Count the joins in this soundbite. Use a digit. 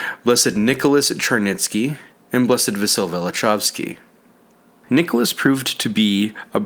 1